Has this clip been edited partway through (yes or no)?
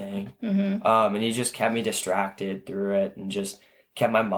no